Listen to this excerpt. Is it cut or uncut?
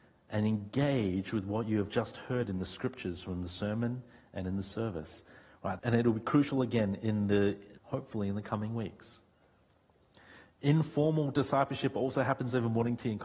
cut